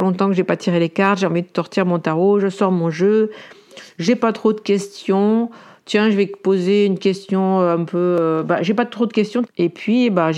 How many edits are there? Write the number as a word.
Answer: one